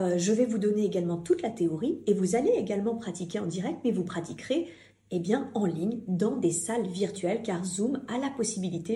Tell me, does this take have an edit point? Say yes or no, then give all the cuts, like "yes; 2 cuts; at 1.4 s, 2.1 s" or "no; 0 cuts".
no; 0 cuts